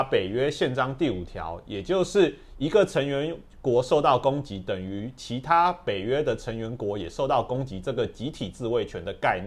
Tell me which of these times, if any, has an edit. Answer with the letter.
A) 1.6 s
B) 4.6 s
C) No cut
C